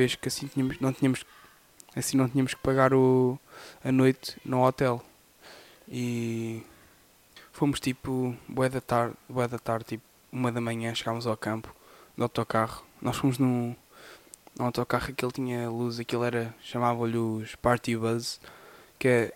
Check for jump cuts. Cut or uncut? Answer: uncut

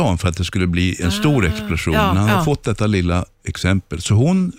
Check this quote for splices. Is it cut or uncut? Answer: uncut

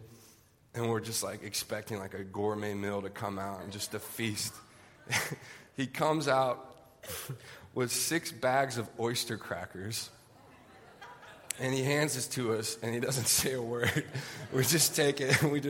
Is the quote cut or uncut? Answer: uncut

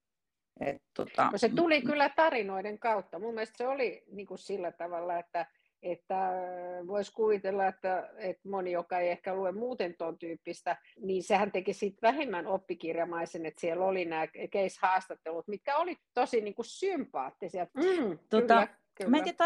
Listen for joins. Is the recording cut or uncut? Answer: cut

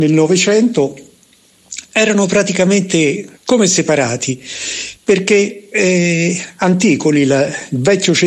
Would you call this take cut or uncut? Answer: cut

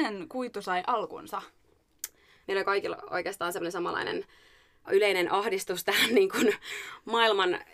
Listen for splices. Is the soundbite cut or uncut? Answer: cut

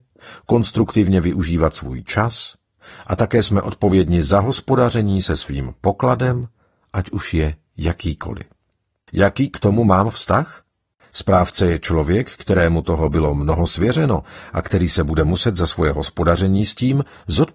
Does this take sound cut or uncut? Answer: cut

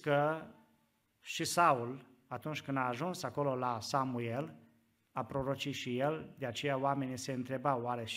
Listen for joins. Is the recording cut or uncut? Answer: uncut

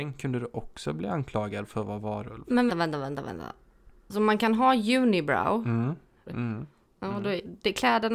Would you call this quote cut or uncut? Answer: cut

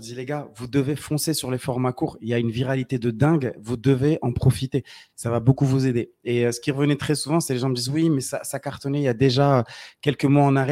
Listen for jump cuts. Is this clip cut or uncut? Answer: uncut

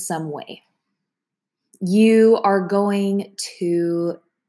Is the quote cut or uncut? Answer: uncut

